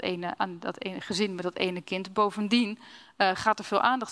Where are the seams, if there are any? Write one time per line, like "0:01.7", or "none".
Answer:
none